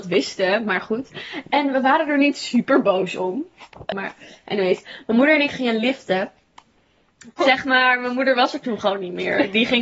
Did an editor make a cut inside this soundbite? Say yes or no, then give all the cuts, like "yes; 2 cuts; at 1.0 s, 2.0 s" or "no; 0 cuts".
yes; 2 cuts; at 3.9 s, 7.4 s